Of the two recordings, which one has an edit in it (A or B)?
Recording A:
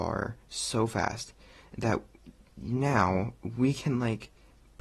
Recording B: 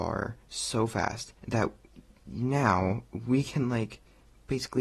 B